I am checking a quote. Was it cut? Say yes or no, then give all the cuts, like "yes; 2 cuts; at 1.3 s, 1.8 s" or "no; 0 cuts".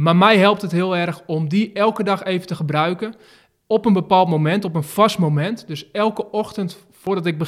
no; 0 cuts